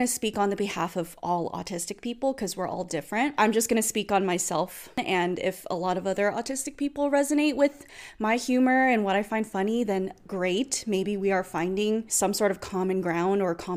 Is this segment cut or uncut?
uncut